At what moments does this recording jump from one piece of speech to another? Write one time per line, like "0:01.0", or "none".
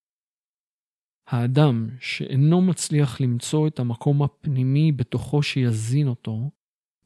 0:01.2